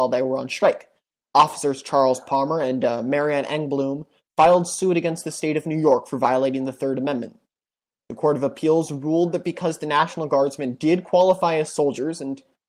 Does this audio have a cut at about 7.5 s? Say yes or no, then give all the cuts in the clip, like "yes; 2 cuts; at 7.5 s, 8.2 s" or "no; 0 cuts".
no; 1 cut; at 1.1 s